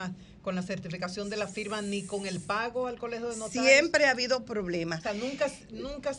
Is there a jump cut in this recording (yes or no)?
no